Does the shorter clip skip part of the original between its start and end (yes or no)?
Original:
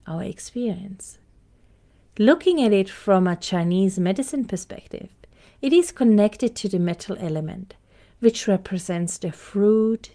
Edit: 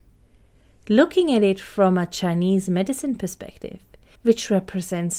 yes